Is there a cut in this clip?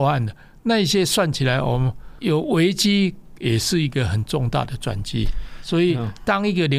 no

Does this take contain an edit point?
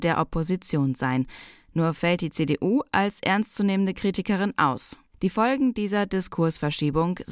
yes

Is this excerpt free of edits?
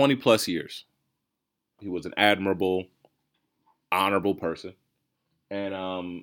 no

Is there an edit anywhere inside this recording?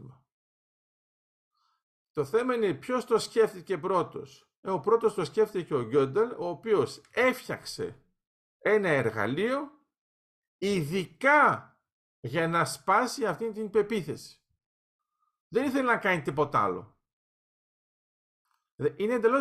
no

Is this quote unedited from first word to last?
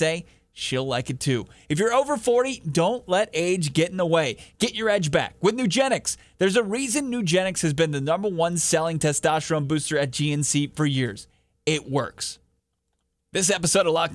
yes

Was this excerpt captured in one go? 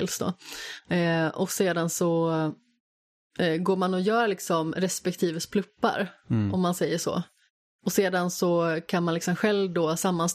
yes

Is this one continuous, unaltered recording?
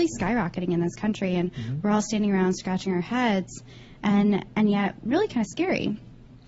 no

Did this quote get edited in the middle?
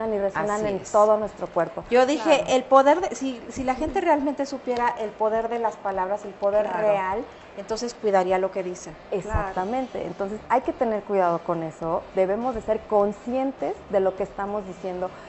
no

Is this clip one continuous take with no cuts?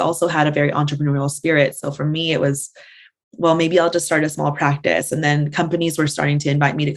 yes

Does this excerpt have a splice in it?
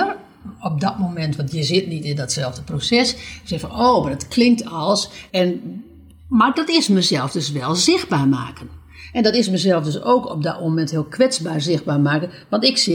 yes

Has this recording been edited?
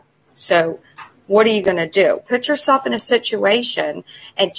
yes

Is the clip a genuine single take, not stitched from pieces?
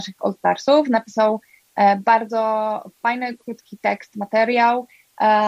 yes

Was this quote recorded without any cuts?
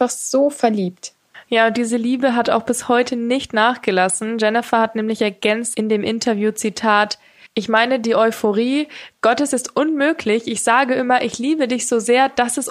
yes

